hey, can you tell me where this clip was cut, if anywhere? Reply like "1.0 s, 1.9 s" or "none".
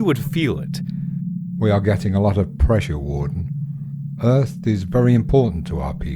none